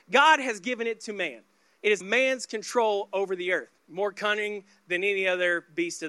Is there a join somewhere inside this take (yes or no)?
yes